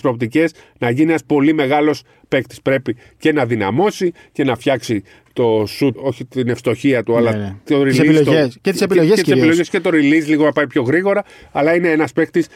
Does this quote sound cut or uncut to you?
cut